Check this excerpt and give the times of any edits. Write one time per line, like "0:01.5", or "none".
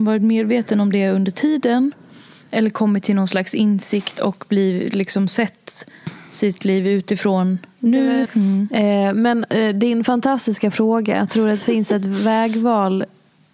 0:08.3